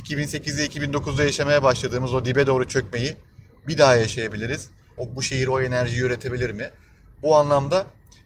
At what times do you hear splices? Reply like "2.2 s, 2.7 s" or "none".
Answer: 5.0 s